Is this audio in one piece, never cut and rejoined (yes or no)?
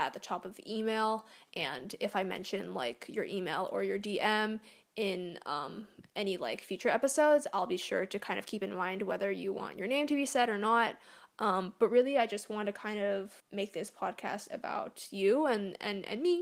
no